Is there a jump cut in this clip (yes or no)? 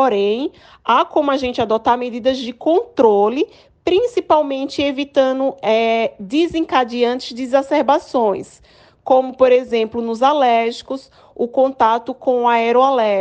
no